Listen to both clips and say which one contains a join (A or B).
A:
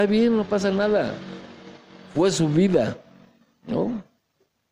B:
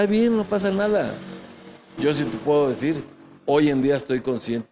B